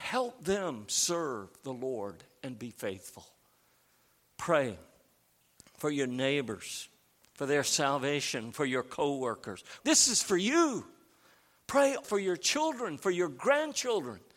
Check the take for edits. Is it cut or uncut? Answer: cut